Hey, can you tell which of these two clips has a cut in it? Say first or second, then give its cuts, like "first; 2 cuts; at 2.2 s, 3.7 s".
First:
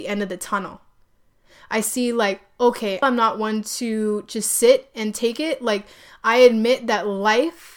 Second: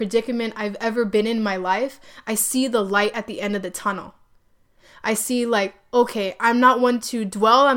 first; 1 cut; at 3.0 s